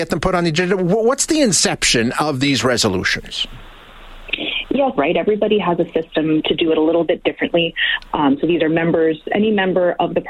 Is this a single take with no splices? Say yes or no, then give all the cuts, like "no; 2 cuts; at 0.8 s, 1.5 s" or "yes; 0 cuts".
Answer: no; 2 cuts; at 5.0 s, 8.1 s